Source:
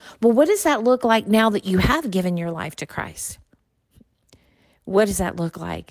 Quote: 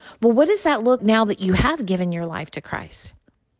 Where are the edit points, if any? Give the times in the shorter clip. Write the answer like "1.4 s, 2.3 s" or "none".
1.0 s